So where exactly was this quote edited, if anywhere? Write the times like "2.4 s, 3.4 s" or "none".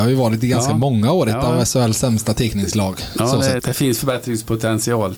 3.6 s